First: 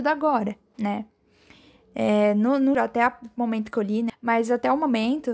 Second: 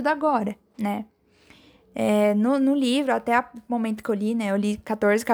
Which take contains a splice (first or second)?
first